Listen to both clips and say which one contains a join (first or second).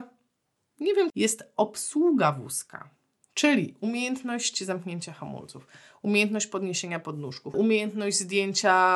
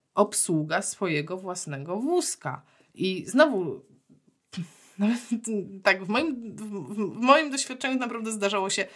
first